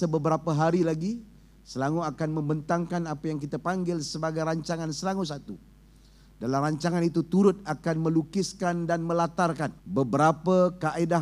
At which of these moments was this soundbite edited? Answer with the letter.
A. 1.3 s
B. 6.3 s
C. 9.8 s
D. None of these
C